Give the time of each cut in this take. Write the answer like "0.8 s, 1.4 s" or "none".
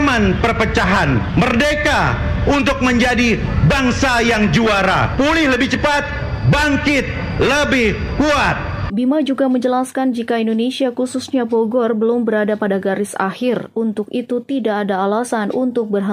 5.2 s, 8.9 s